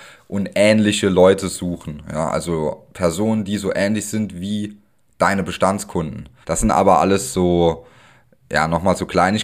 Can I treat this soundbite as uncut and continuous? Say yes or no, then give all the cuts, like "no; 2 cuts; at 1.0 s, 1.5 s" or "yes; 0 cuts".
no; 1 cut; at 6.4 s